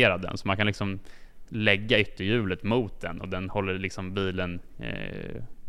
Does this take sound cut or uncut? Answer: uncut